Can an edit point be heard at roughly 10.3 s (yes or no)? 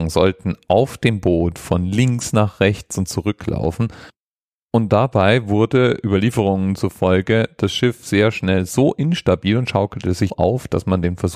yes